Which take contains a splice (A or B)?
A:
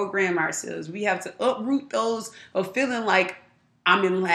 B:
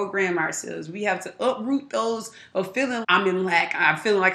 B